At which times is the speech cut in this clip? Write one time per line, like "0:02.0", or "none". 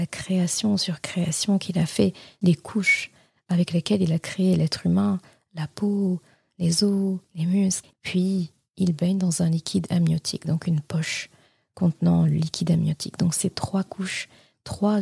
0:07.9